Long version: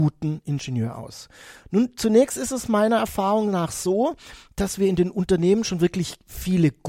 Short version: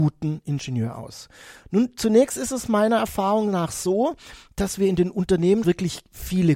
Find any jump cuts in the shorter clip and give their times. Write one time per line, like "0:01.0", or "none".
0:05.6